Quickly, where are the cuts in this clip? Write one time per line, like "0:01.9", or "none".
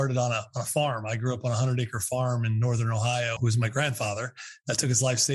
0:03.4